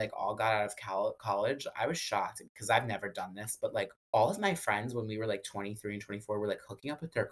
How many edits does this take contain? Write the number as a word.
one